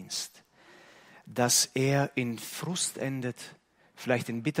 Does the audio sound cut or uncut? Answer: uncut